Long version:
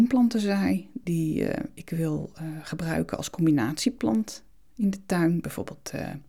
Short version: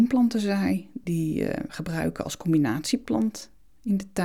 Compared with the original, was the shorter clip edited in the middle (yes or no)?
yes